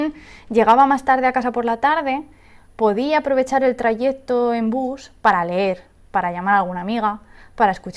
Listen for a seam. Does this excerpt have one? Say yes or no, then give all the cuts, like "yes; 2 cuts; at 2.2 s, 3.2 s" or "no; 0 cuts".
no; 0 cuts